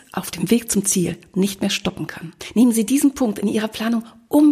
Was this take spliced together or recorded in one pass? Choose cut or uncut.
uncut